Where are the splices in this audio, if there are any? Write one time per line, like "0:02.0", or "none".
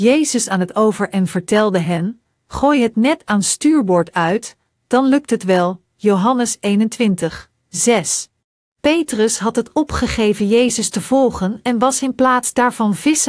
0:08.7